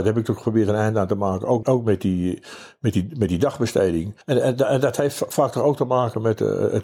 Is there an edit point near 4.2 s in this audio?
yes; 2 cuts; at 1.6 s, 4.2 s

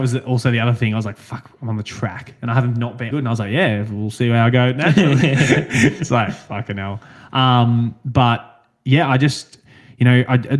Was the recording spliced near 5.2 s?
no; 1 cut; at 3.1 s

